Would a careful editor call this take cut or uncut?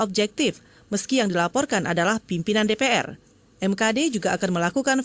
uncut